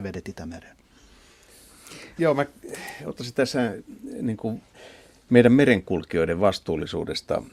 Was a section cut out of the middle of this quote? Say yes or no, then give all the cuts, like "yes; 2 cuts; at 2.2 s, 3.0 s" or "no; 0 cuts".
yes; 1 cut; at 2.2 s